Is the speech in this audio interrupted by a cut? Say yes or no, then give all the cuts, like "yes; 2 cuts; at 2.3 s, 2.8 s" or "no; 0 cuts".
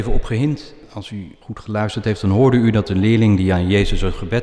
no; 0 cuts